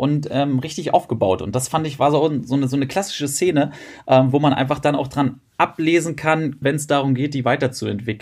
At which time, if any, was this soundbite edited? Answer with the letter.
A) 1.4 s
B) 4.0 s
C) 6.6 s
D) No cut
C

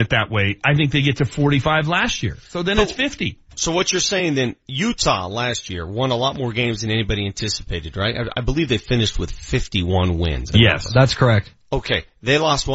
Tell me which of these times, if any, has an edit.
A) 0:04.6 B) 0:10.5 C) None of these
B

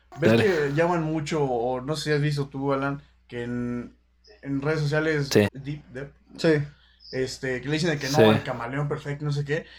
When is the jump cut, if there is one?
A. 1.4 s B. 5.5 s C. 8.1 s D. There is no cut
B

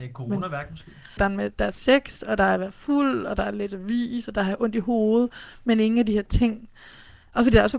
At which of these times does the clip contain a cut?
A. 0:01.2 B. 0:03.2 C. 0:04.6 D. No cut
A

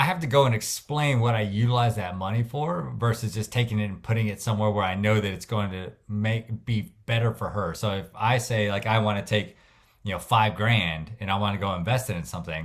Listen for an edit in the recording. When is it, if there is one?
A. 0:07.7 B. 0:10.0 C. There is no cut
C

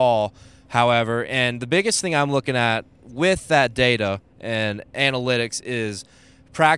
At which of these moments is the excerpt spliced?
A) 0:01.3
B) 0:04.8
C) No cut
C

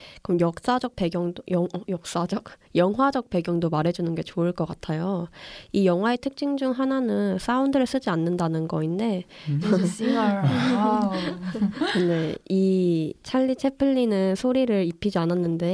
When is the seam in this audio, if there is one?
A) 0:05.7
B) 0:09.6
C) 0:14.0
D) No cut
B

